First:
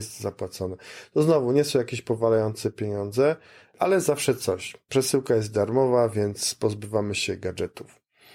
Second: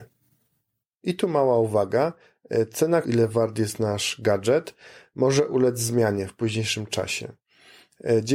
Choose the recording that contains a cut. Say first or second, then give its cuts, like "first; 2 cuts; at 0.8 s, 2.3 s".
second; 1 cut; at 3.0 s